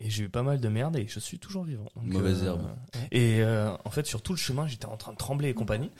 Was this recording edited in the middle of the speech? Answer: yes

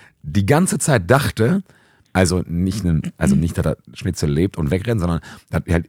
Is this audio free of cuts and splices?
no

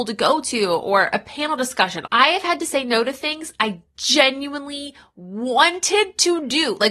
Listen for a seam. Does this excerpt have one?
yes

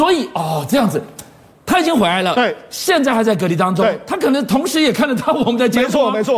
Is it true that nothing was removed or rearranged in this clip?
yes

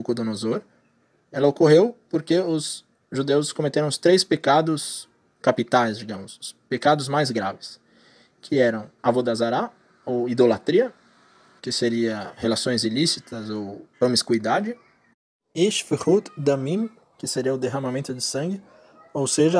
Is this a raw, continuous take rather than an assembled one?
no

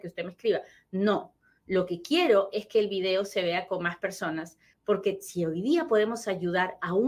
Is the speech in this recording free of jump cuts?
yes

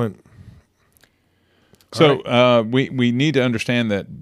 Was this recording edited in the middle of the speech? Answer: no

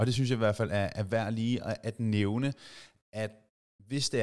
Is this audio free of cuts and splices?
yes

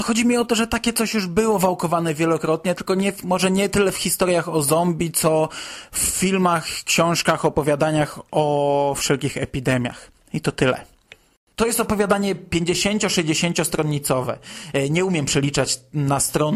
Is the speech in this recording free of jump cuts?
yes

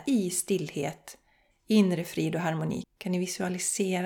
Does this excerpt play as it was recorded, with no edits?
no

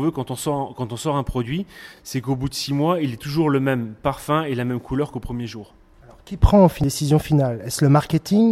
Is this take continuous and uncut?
yes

